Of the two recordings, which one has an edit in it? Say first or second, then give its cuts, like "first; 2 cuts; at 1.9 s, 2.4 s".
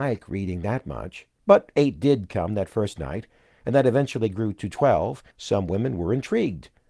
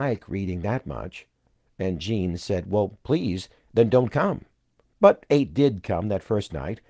first; 2 cuts; at 1.4 s, 5.3 s